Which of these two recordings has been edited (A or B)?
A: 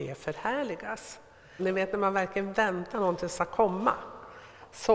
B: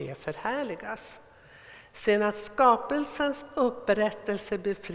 A